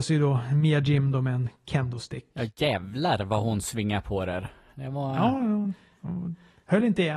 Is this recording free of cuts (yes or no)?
yes